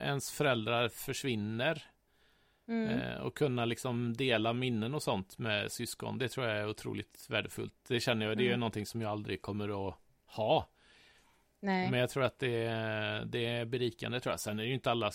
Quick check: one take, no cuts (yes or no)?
yes